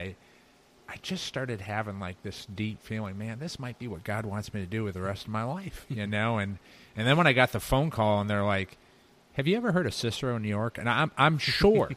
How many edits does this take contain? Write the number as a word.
zero